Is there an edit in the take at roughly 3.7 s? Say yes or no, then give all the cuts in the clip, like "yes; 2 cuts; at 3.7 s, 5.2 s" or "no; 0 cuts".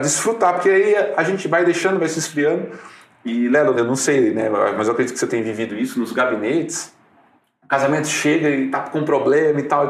yes; 1 cut; at 3.7 s